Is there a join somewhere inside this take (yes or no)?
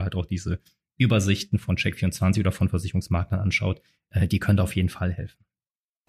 no